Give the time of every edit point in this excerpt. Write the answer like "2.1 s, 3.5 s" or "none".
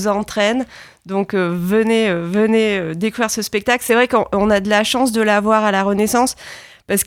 none